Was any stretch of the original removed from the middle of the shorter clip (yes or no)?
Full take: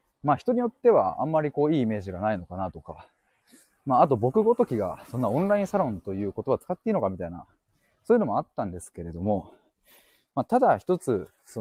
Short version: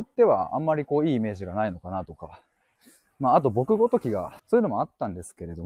yes